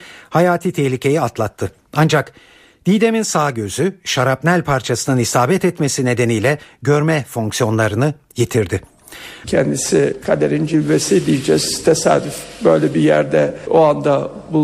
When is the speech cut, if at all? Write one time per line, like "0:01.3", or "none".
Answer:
0:09.4